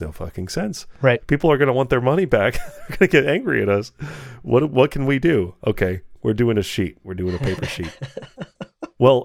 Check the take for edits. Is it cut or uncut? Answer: uncut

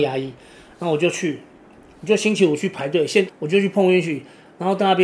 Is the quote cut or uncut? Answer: cut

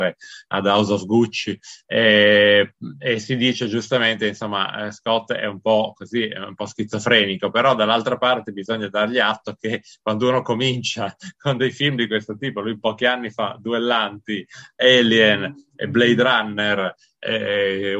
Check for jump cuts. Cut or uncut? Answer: uncut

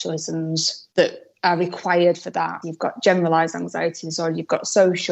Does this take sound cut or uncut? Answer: cut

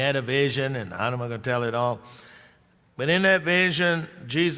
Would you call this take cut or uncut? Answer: uncut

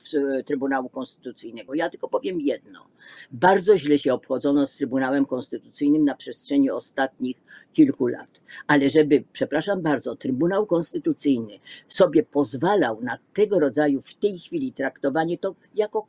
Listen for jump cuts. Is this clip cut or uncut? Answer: uncut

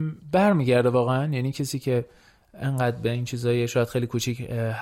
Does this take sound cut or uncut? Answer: uncut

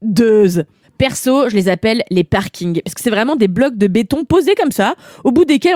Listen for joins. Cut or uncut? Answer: uncut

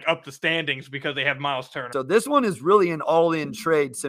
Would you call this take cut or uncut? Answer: cut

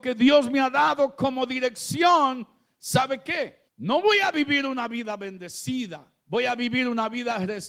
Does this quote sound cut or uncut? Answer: cut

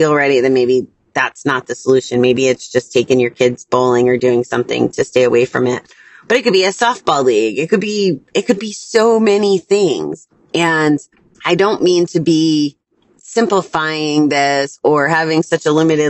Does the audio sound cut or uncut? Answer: uncut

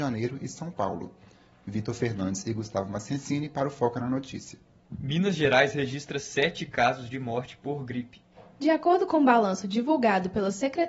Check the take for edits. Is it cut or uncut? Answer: uncut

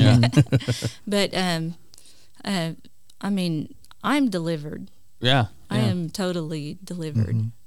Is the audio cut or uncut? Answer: uncut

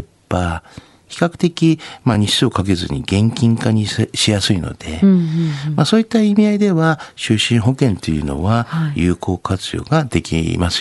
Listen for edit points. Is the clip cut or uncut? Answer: uncut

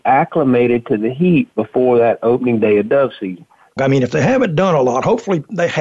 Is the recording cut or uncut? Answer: cut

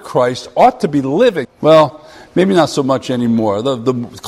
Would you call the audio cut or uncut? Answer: cut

